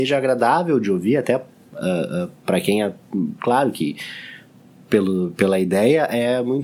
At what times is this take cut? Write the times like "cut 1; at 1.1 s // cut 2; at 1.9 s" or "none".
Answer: none